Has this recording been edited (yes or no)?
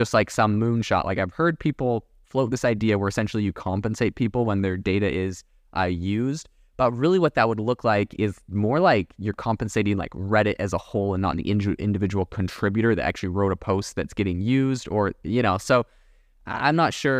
no